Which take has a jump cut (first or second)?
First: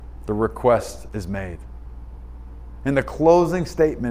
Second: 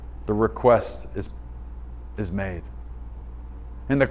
first